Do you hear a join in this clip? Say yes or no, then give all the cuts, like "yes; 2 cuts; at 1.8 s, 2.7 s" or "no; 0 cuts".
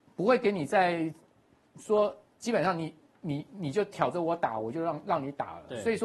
no; 0 cuts